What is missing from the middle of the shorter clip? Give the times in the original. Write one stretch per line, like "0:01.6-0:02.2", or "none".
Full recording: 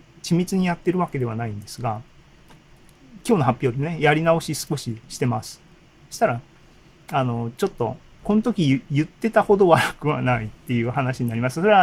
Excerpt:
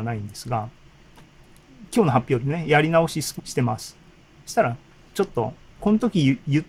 0:04.7-0:05.0
0:06.8-0:07.6